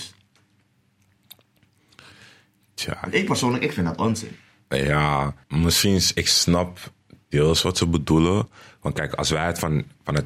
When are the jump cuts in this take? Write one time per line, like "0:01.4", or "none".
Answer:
0:05.4